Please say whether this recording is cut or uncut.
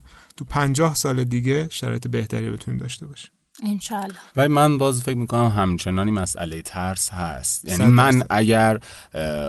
cut